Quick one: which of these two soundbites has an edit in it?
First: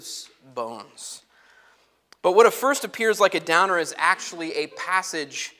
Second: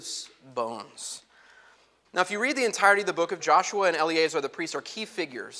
second; 2 cuts; at 2.0 s, 3.4 s

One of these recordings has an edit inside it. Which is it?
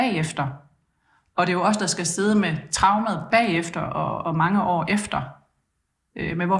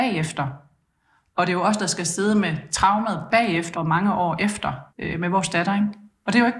second; 2 cuts; at 3.7 s, 4.9 s

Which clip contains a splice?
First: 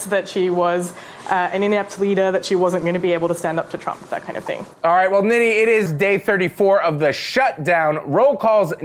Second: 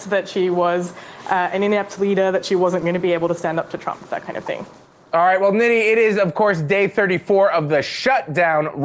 first; 2 cuts; at 4.7 s, 5.9 s

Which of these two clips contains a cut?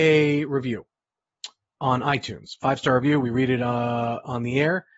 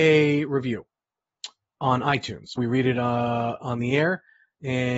second; 1 cut; at 2.6 s

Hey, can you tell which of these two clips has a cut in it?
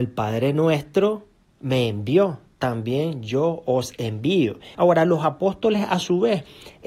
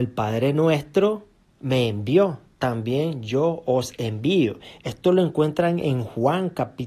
first; 1 cut; at 4.7 s

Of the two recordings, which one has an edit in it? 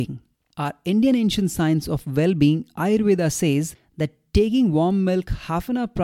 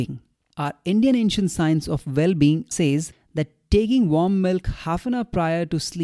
second; 1 cut; at 2.7 s

